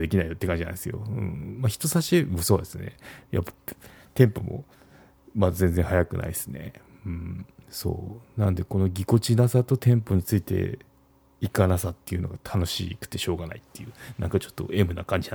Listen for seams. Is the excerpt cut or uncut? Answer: uncut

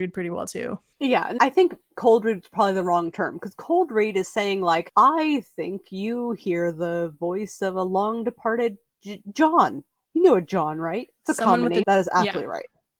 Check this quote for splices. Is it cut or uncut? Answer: cut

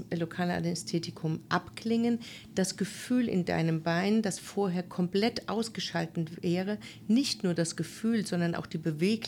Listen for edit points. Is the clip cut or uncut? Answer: uncut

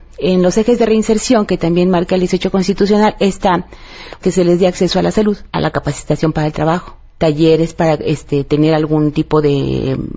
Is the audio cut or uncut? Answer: cut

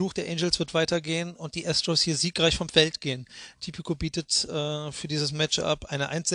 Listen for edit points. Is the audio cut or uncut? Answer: uncut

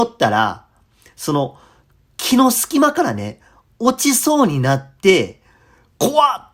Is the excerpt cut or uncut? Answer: uncut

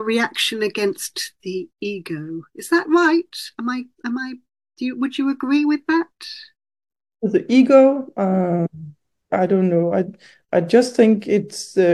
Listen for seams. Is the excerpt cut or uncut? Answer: cut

